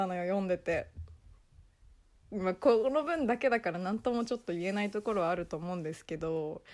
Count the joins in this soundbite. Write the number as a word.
one